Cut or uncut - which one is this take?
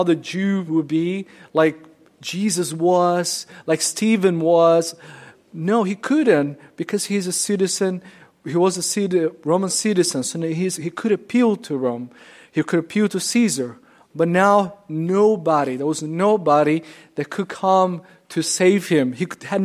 uncut